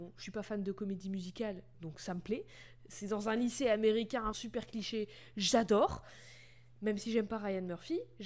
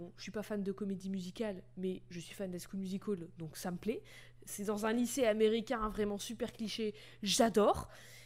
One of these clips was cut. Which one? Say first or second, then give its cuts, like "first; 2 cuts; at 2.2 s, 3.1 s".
first; 2 cuts; at 1.7 s, 4.3 s